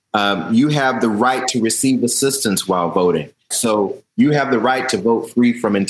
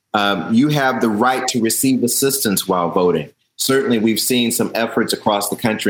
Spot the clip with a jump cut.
first; 1 cut; at 3.5 s

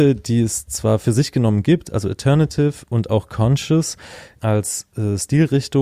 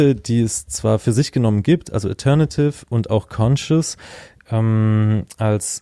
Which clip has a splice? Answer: first; 1 cut; at 4.4 s

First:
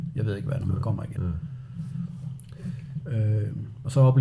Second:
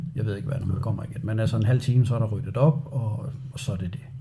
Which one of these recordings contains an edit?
first; 2 cuts; at 1.2 s, 3.0 s

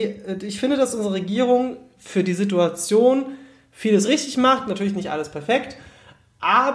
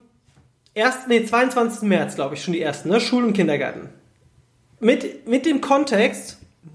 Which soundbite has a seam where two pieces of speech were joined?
second; 1 cut; at 4.8 s

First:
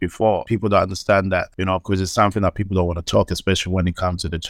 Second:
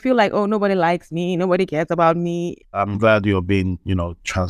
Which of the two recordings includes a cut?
second; 1 cut; at 2.6 s

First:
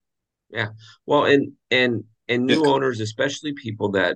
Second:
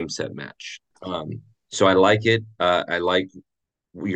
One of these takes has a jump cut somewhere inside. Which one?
second; 1 cut; at 0.9 s

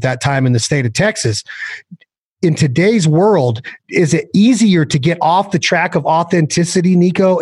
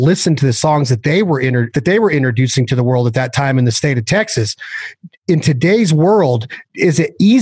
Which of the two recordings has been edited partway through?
second; 2 cuts; at 1.7 s, 5.2 s

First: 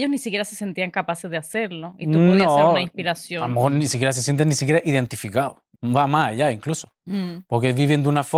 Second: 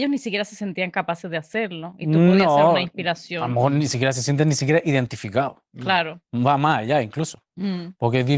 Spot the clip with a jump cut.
first; 1 cut; at 5.7 s

